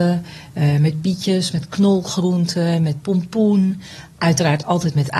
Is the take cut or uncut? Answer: uncut